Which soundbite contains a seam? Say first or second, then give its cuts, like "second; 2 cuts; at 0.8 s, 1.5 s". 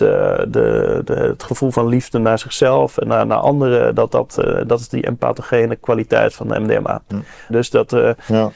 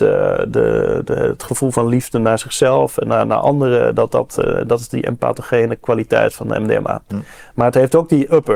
first; 1 cut; at 7.5 s